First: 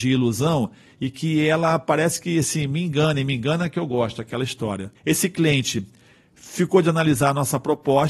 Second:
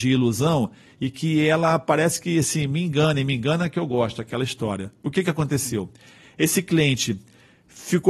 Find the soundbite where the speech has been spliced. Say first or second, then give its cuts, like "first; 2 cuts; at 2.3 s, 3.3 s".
first; 1 cut; at 4.9 s